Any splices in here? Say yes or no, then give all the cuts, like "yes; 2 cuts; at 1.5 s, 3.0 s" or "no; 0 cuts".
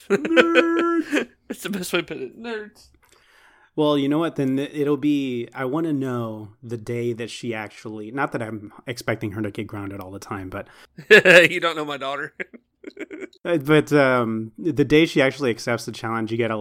no; 0 cuts